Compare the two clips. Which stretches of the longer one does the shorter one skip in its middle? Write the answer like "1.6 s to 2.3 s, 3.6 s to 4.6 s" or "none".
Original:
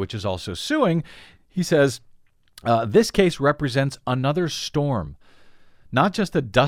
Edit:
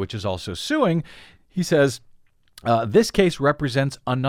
none